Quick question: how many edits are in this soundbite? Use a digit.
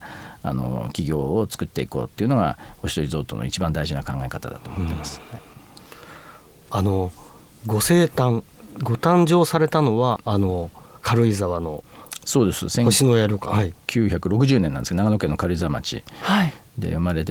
1